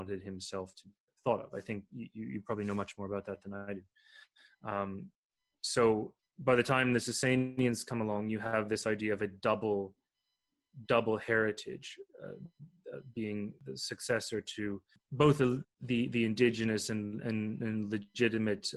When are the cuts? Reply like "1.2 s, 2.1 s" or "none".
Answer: none

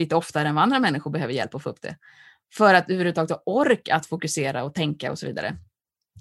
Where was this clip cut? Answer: none

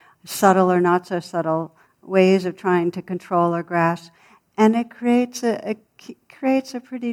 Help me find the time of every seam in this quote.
none

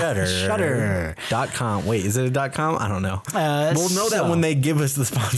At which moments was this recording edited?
none

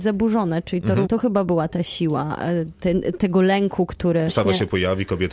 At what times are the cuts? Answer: 1.0 s, 4.3 s

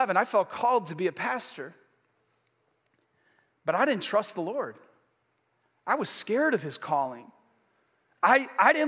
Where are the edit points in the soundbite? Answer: none

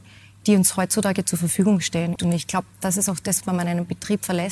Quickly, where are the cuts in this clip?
2.2 s, 3.4 s

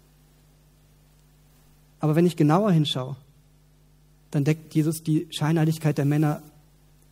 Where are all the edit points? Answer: none

